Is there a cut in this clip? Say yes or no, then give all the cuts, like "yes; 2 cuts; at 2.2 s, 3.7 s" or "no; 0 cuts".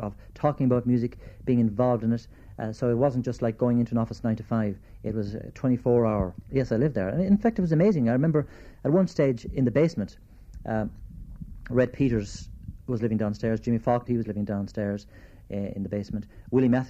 yes; 2 cuts; at 6.5 s, 14.1 s